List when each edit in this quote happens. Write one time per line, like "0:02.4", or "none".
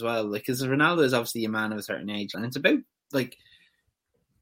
0:02.3